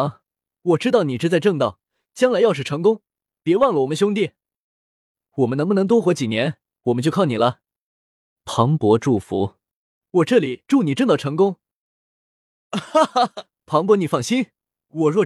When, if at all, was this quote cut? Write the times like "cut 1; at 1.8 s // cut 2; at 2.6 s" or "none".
none